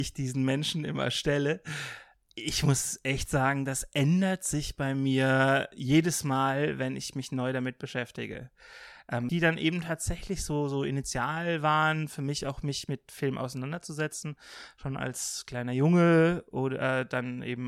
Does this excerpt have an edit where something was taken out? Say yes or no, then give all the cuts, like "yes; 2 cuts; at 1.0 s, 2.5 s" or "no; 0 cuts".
yes; 1 cut; at 9.3 s